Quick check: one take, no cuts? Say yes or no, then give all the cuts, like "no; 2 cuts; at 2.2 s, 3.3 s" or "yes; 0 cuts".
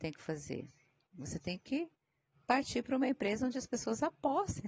yes; 0 cuts